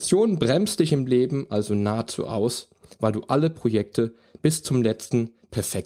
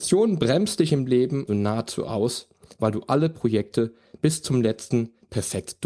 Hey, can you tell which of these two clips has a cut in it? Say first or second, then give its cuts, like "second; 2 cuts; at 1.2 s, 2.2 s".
second; 1 cut; at 1.5 s